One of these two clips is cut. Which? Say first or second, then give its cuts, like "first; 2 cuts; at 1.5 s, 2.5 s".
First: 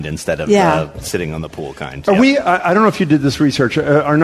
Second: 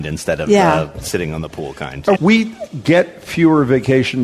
second; 1 cut; at 2.1 s